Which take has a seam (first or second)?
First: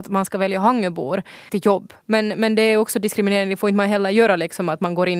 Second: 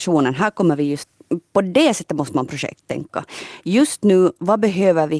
first